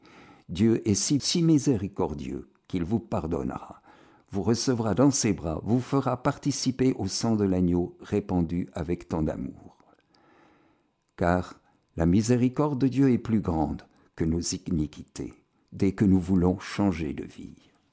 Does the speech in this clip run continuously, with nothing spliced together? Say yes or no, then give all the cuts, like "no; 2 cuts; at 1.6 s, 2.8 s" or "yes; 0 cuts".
no; 1 cut; at 1.2 s